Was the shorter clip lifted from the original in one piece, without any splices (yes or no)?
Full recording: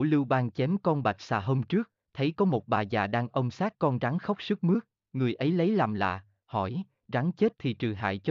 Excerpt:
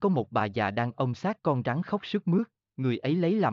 yes